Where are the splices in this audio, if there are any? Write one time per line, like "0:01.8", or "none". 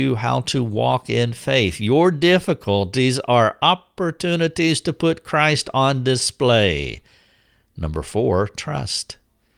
none